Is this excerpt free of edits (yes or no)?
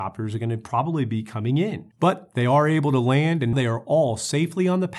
no